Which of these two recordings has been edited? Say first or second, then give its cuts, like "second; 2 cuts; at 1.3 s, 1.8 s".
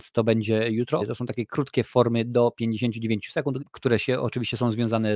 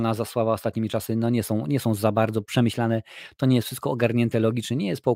first; 2 cuts; at 1.0 s, 3.6 s